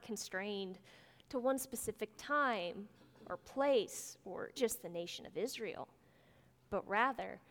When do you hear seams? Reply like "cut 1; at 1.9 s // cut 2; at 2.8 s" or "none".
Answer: cut 1; at 4.6 s